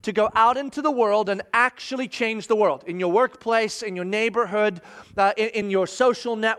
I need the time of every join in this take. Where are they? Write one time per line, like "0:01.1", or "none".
none